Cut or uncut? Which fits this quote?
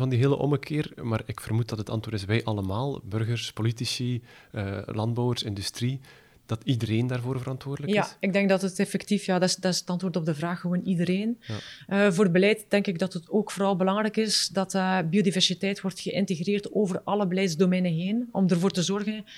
uncut